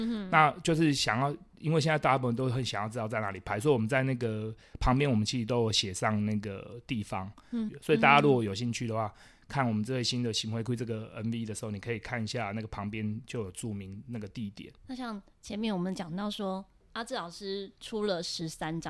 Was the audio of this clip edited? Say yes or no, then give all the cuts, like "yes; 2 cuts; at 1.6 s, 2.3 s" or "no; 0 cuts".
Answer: yes; 2 cuts; at 7.7 s, 14.8 s